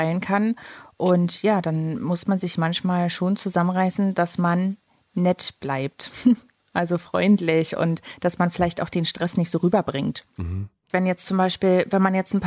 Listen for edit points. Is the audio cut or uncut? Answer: uncut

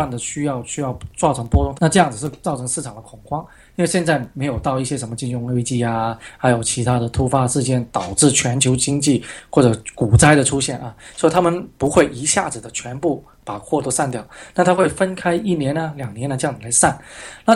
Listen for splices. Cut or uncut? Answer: cut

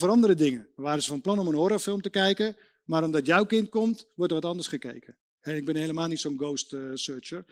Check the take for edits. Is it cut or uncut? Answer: cut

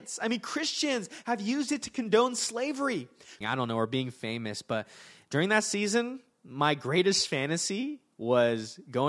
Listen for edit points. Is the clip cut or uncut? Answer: cut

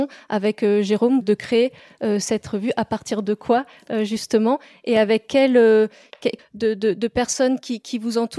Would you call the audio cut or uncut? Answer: cut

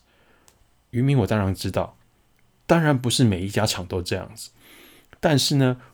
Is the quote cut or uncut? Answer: uncut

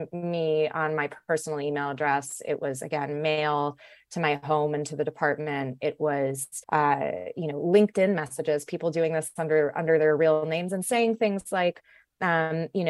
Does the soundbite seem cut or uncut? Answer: cut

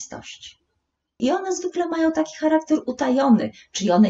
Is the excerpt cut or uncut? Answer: cut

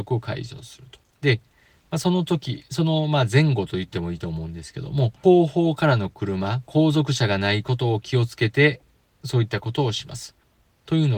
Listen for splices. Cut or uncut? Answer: cut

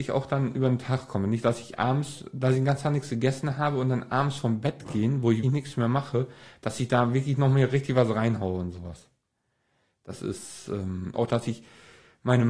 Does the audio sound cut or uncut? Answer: cut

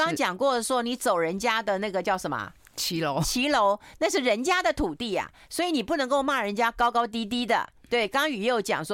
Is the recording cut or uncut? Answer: uncut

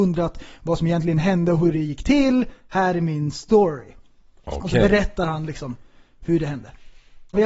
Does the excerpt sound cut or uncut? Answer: uncut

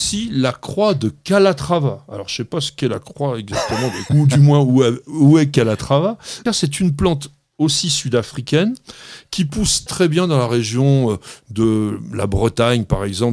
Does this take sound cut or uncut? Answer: cut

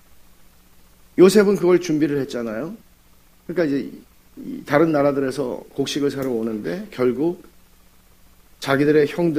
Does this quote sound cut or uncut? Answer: uncut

